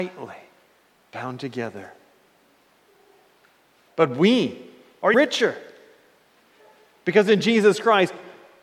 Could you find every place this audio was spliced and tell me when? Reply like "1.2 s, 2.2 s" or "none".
3.9 s, 5.1 s